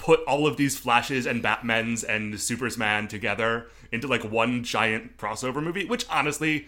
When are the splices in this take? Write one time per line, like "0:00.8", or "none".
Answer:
0:05.2